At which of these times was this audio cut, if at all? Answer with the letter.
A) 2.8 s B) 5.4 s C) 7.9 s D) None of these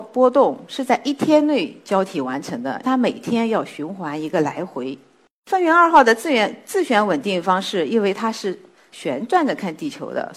A